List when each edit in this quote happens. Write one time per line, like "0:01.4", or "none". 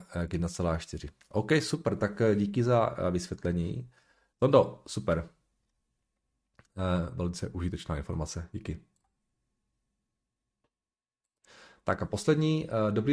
0:04.3